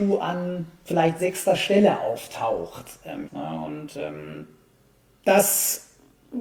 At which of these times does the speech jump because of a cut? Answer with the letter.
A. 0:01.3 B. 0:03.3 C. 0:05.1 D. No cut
B